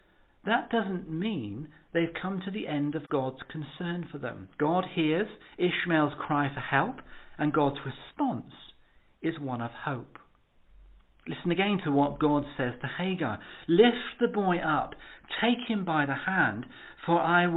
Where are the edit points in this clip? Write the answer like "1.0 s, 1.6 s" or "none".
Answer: none